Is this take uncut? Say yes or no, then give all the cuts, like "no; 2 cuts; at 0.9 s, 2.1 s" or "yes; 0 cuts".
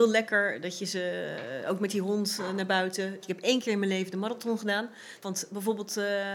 no; 2 cuts; at 3.2 s, 5.2 s